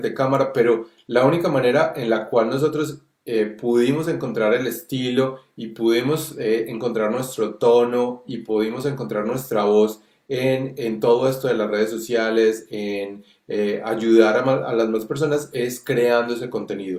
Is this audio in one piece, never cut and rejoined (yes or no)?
yes